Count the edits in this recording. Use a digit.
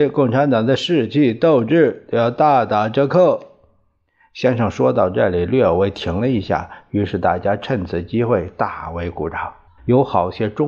1